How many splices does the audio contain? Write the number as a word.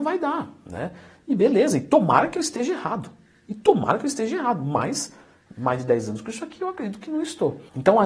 zero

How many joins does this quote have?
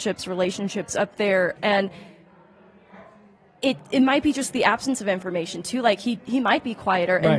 one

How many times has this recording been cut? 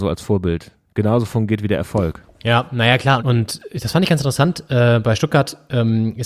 one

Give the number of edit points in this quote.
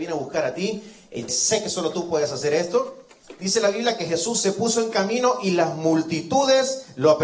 one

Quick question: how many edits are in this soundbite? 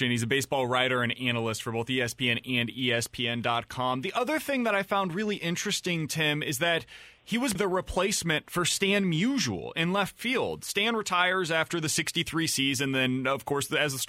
one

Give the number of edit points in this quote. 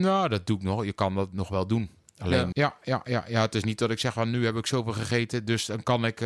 one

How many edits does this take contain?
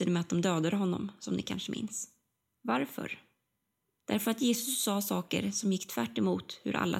zero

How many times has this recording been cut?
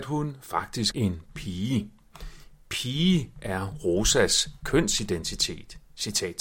one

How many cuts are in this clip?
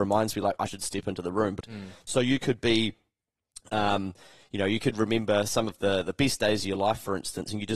one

